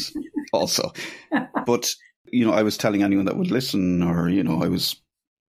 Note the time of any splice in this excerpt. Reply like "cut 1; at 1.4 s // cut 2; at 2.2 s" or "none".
none